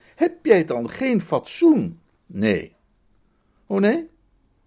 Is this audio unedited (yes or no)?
no